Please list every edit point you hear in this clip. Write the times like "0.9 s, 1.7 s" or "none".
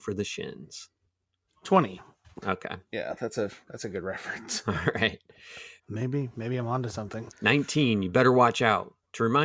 2.4 s, 5.8 s, 7.3 s